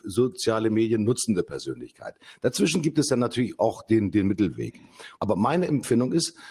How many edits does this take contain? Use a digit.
1